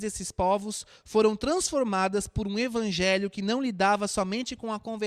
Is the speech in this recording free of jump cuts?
yes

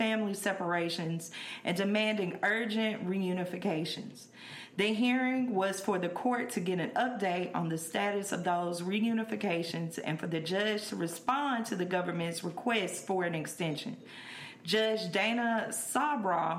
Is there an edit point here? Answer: no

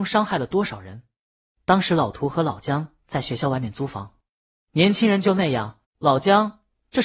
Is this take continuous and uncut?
no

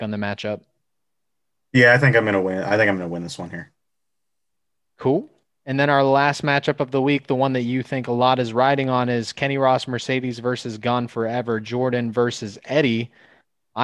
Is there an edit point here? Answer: no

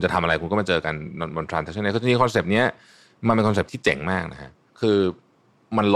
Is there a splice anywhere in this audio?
yes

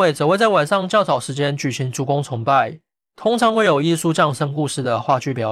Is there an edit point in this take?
no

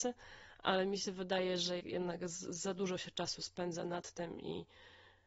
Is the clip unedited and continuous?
no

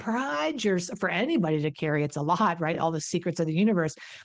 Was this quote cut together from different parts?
no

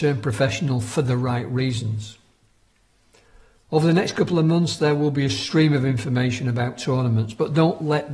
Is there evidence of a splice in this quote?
no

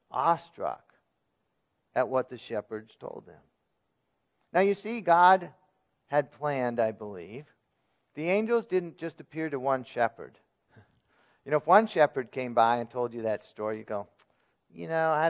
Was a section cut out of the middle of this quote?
no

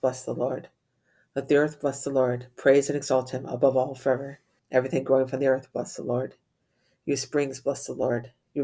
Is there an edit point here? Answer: yes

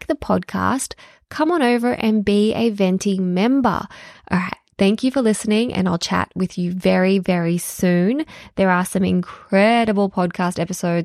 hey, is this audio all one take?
no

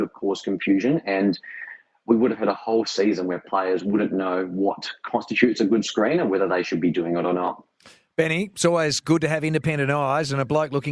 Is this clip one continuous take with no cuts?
yes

